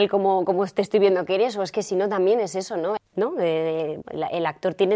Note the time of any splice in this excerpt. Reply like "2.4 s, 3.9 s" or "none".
3.0 s, 4.0 s